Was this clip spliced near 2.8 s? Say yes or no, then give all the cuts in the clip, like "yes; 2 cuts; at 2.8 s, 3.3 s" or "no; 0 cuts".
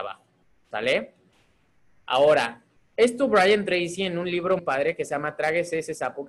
no; 1 cut; at 4.6 s